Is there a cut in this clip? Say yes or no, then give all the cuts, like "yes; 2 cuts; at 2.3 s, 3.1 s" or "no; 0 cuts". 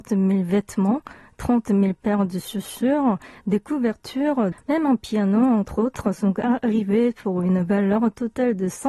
yes; 1 cut; at 4.5 s